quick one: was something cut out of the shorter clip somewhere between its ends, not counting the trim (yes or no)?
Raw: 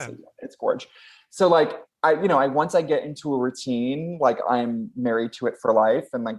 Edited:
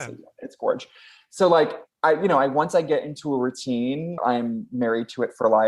yes